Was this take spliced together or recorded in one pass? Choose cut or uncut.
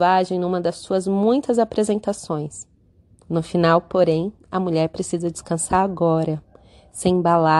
cut